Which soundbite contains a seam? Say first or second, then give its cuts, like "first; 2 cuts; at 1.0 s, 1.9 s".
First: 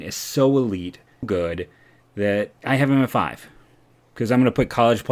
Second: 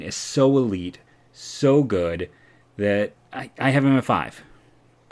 first; 2 cuts; at 1.2 s, 2.6 s